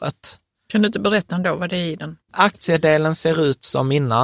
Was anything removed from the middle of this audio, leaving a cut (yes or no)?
no